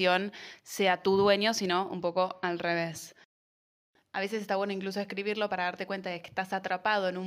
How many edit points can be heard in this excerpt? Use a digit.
0